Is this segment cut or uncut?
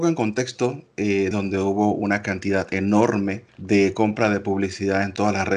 cut